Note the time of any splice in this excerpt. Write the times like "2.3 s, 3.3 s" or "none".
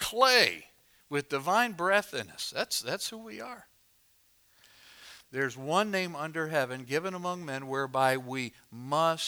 5.2 s